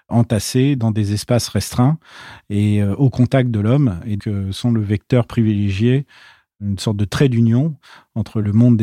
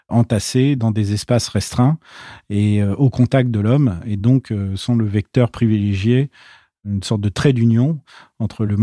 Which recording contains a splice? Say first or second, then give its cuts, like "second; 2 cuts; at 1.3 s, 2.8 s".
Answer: first; 1 cut; at 4.2 s